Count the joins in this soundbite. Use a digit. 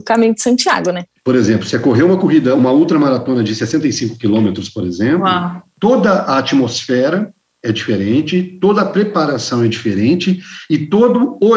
0